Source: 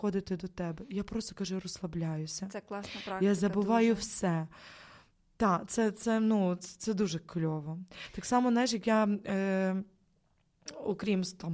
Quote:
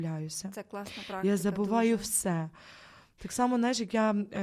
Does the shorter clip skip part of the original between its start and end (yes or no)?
yes